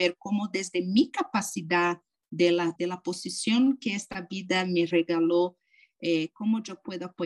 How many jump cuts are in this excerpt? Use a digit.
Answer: 1